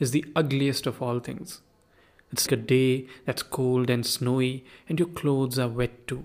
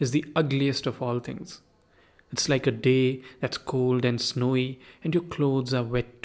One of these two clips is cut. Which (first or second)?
first